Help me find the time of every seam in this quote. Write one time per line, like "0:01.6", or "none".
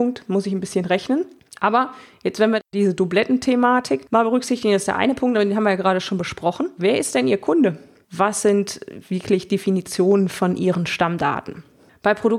0:06.8
0:08.0